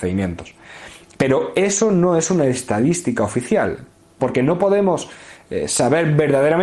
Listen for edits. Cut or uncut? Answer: cut